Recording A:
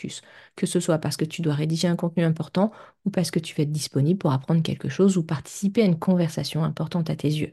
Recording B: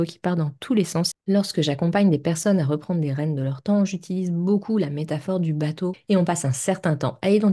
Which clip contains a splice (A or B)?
B